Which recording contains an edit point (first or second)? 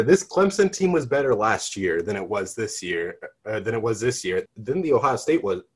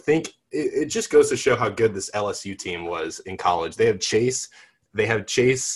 first